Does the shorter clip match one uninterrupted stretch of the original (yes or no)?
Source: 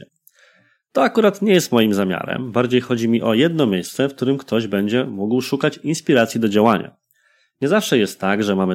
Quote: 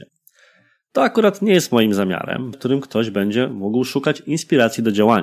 no